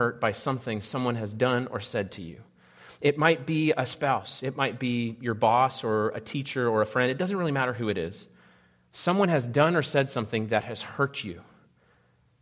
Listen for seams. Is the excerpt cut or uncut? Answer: uncut